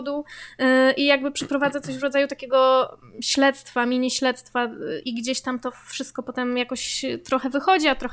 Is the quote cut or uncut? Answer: cut